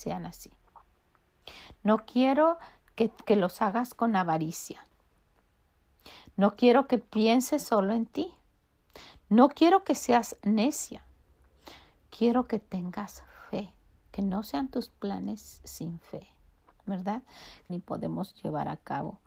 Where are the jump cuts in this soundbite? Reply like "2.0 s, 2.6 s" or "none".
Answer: 17.7 s